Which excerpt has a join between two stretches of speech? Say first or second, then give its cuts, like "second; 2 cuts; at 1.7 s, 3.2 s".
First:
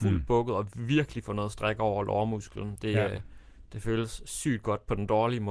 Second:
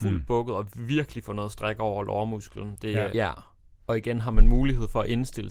second; 1 cut; at 3.1 s